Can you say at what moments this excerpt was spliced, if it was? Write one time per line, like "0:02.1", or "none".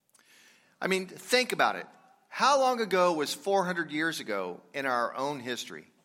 none